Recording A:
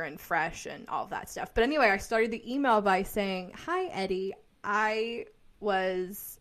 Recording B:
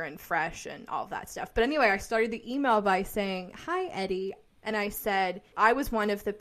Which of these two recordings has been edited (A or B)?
B